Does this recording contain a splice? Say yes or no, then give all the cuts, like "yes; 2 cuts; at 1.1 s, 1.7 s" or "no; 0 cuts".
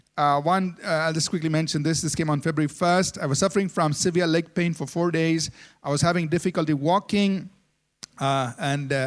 no; 0 cuts